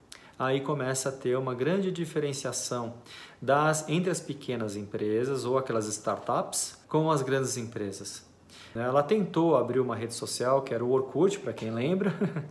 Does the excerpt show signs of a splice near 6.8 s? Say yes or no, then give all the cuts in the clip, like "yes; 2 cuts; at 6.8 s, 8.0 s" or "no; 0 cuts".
yes; 2 cuts; at 6.8 s, 8.8 s